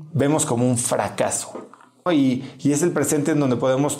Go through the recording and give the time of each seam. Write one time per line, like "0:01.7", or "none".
0:02.1